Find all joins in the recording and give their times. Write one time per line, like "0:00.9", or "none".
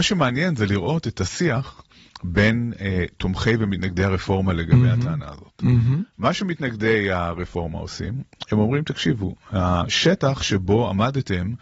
none